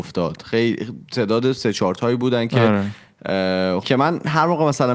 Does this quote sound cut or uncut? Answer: cut